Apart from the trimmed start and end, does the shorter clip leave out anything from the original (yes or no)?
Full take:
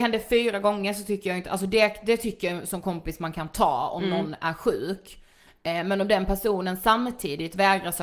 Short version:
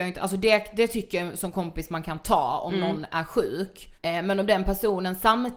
yes